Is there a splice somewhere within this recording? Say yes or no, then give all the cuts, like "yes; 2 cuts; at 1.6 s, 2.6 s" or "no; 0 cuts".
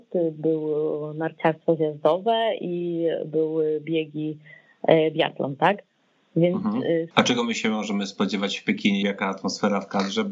yes; 2 cuts; at 7.1 s, 9.0 s